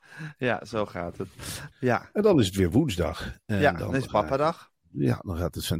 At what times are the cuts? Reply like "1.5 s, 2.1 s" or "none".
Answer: 1.7 s